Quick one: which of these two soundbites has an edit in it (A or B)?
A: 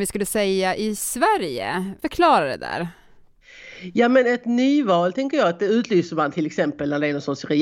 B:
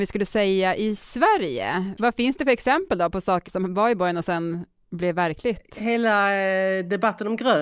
B